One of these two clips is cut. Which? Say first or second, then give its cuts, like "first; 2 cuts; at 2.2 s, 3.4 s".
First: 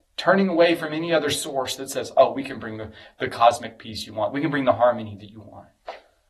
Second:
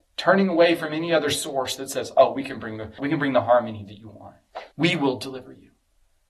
second; 2 cuts; at 3.0 s, 4.7 s